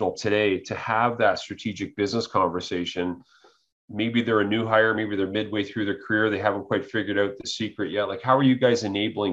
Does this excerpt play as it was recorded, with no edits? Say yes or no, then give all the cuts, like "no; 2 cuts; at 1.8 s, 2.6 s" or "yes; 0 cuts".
yes; 0 cuts